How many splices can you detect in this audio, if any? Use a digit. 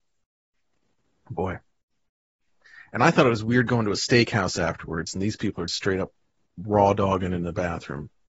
1